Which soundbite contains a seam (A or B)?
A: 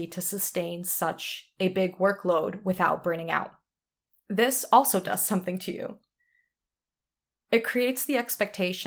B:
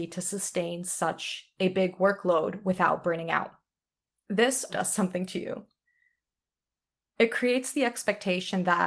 B